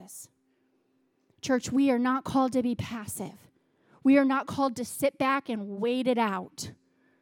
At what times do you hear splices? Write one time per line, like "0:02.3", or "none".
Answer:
none